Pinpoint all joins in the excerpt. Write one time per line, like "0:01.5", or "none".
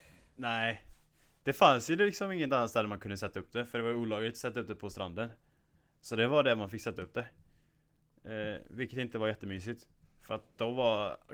none